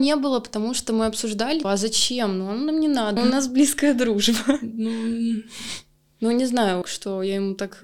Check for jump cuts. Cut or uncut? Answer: cut